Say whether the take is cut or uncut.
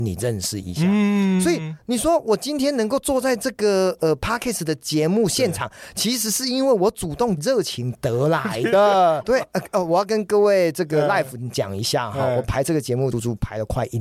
cut